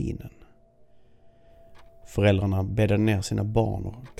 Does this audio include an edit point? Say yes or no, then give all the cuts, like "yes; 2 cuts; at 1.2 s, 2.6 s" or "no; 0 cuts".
yes; 1 cut; at 2.0 s